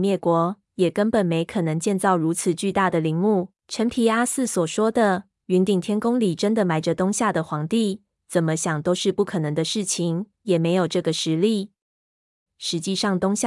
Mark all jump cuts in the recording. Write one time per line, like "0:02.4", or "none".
0:03.6
0:10.4
0:12.5